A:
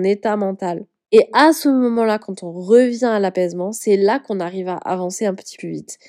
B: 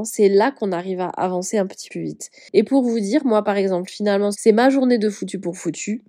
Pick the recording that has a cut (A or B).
B